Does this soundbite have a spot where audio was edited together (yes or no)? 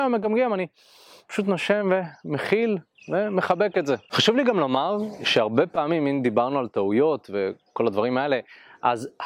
no